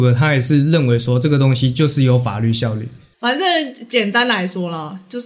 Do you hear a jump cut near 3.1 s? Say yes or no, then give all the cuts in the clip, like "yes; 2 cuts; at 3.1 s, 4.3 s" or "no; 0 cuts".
yes; 1 cut; at 3.1 s